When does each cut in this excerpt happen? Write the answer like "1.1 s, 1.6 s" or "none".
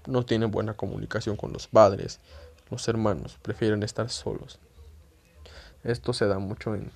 5.7 s